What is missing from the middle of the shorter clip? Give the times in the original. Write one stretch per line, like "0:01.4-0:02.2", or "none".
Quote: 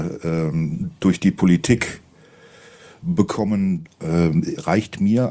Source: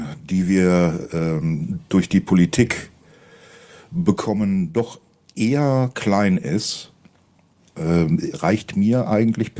0:04.7-0:07.6